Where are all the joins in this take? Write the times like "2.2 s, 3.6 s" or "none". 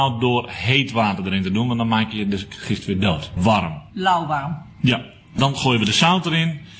none